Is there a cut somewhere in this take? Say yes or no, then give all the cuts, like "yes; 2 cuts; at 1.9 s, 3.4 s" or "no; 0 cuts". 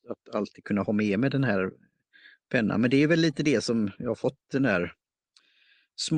no; 0 cuts